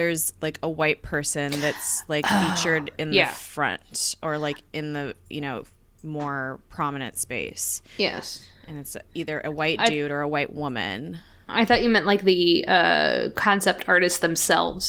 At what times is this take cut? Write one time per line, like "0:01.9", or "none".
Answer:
0:06.0